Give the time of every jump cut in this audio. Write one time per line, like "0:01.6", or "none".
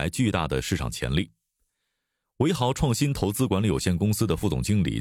none